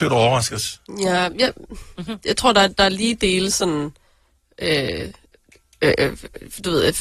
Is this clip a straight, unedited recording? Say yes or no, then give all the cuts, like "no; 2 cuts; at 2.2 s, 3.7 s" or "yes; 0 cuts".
yes; 0 cuts